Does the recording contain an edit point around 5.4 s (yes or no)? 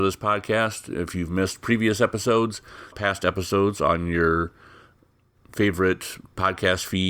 no